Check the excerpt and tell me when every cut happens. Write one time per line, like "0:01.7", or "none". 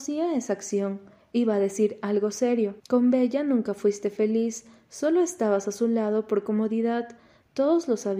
0:02.8